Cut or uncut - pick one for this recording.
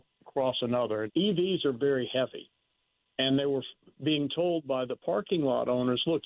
cut